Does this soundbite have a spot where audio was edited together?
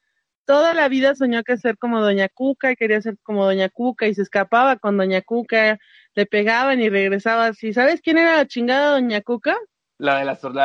no; 0 cuts

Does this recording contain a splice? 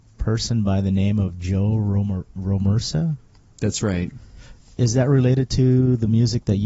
no; 0 cuts

